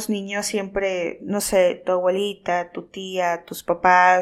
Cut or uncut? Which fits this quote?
uncut